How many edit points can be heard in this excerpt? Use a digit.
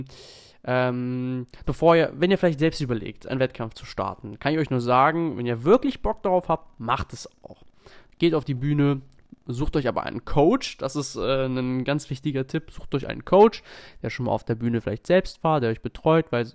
1